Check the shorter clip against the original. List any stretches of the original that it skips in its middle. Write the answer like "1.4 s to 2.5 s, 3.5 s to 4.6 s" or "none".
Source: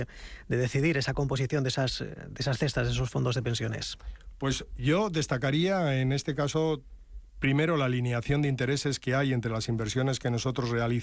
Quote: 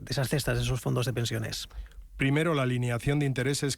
4.4 s to 7.3 s